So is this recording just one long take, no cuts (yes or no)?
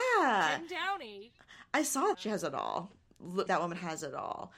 no